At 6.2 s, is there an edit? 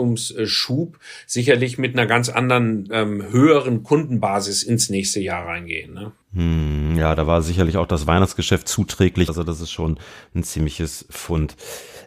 yes; 2 cuts; at 6.2 s, 9.3 s

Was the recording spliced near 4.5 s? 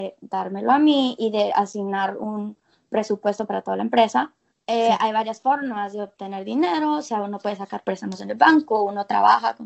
yes; 1 cut; at 4.5 s

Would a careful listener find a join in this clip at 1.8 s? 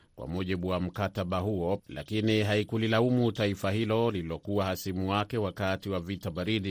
yes; 1 cut; at 1.8 s

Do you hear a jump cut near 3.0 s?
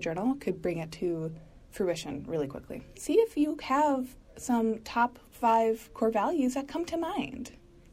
yes; 1 cut; at 3.0 s

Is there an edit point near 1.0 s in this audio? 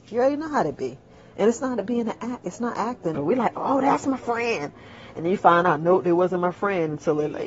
no; 1 cut; at 3.1 s

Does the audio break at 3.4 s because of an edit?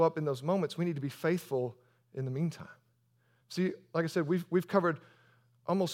no; 0 cuts

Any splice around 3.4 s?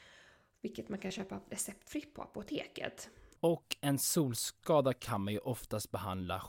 yes; 1 cut; at 3.4 s

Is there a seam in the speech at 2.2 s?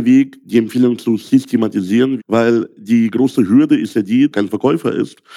yes; 2 cuts; at 2.2 s, 4.3 s

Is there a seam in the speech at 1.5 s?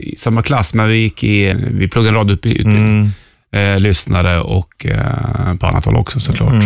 yes; 2 cuts; at 1.5 s, 3.3 s

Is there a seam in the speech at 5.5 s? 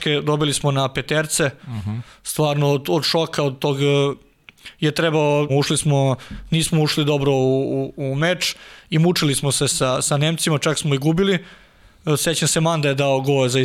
yes; 1 cut; at 5.5 s

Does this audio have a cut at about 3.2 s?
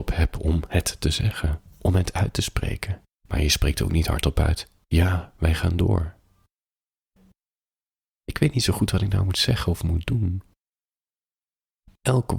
yes; 1 cut; at 3.2 s

